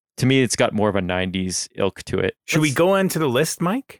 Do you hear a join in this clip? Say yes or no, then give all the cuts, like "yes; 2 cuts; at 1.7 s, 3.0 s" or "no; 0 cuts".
yes; 1 cut; at 2.4 s